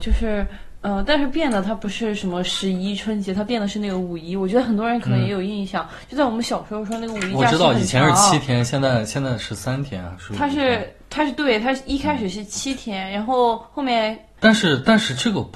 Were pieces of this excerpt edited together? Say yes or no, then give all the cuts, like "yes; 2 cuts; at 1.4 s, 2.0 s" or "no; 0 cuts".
yes; 1 cut; at 14.4 s